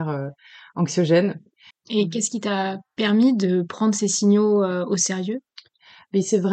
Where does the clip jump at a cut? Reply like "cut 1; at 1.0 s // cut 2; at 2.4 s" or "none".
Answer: cut 1; at 1.7 s